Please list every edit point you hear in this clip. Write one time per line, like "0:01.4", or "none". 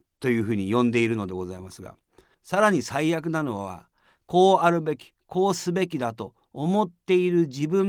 0:02.3